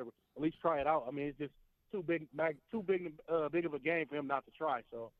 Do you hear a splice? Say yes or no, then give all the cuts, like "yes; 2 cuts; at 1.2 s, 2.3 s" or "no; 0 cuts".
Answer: no; 0 cuts